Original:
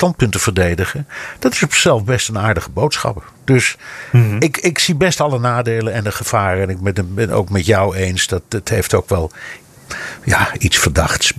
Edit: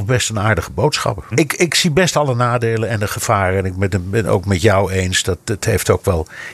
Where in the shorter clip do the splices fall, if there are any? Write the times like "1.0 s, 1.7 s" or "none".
1.3 s